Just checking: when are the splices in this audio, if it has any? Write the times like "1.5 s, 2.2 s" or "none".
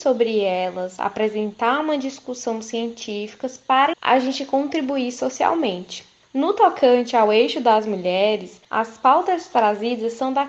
3.9 s